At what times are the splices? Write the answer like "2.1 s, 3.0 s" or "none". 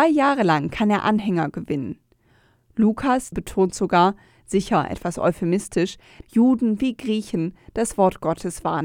3.3 s, 6.2 s